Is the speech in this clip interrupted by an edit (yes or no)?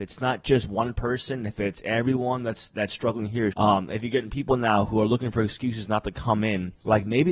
yes